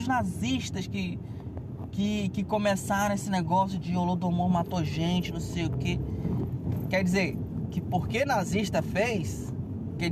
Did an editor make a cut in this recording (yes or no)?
no